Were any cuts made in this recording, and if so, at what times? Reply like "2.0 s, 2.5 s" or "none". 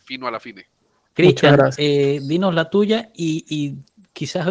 1.1 s